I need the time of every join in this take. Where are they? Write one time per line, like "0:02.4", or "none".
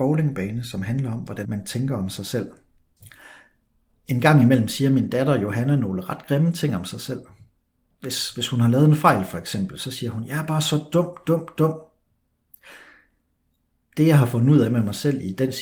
0:01.4